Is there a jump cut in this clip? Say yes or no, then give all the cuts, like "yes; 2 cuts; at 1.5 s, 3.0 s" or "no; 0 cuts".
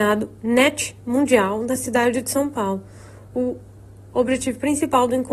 no; 0 cuts